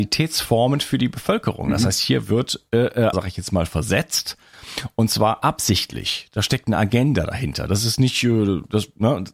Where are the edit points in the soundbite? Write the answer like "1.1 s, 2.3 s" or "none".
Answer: 3.1 s